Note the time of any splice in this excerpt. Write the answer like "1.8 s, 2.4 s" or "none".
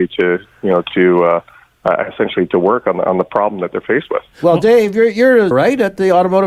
5.5 s